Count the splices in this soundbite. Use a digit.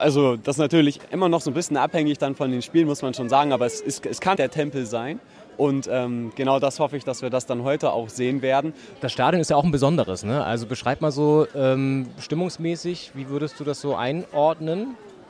2